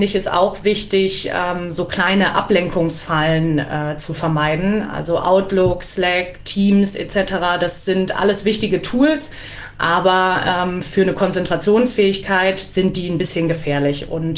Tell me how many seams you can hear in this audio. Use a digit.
0